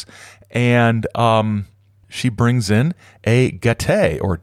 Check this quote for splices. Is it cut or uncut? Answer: cut